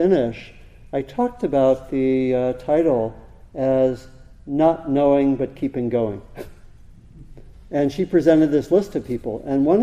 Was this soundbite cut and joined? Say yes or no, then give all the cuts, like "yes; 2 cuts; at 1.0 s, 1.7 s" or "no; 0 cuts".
yes; 1 cut; at 7.5 s